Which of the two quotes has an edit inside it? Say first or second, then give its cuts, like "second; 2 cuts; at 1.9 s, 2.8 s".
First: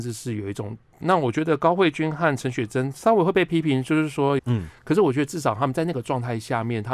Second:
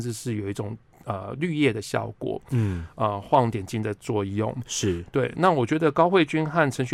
first; 2 cuts; at 1.0 s, 4.4 s